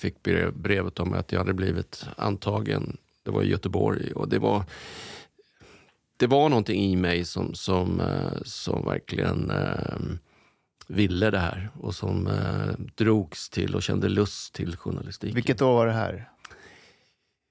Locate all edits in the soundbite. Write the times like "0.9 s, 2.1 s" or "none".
none